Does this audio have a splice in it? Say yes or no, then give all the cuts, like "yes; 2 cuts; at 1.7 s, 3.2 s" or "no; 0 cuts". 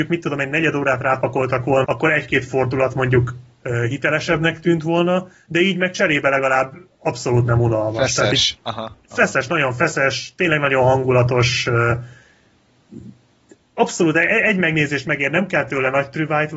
yes; 1 cut; at 1.8 s